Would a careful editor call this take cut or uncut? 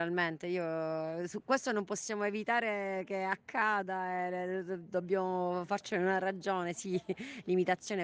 uncut